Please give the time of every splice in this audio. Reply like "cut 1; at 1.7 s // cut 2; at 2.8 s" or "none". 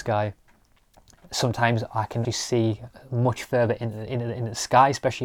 cut 1; at 2.2 s